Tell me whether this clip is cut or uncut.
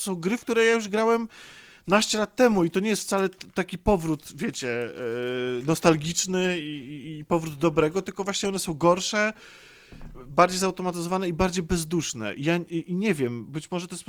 uncut